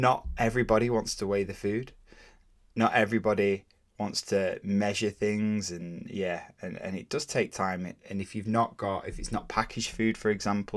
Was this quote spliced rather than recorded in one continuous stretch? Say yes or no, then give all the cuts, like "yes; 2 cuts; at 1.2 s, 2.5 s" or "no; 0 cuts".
no; 0 cuts